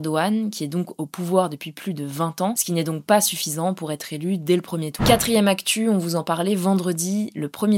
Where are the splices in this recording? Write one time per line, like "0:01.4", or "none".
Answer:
0:02.5
0:05.0